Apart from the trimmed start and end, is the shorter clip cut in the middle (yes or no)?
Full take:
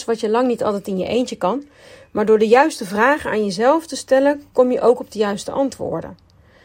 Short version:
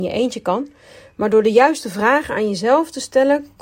no